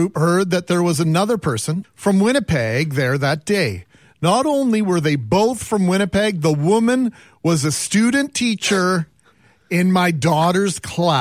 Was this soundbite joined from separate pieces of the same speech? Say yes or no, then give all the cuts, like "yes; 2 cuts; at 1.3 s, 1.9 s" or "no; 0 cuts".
yes; 2 cuts; at 1.8 s, 4.1 s